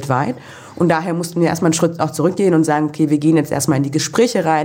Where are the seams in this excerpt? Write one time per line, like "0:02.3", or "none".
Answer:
none

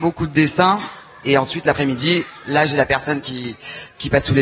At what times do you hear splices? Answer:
none

